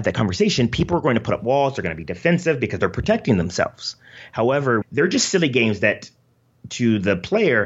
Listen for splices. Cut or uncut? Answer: cut